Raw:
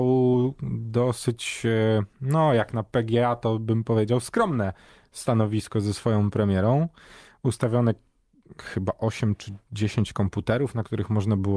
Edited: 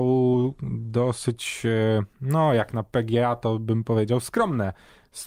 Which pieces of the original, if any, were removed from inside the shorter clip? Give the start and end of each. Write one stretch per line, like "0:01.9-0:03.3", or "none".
none